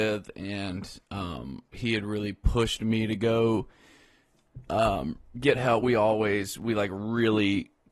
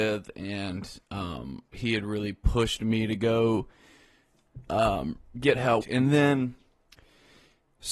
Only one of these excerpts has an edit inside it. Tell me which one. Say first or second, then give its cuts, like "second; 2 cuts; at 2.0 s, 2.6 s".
second; 1 cut; at 5.8 s